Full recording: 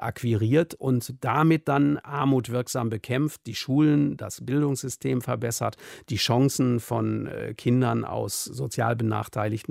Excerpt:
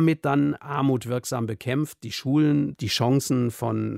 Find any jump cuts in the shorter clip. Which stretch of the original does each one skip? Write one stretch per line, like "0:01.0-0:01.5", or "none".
0:04.2-0:06.0